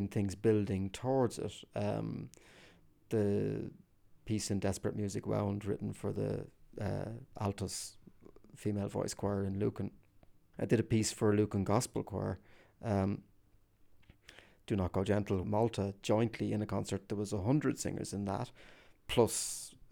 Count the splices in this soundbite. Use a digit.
2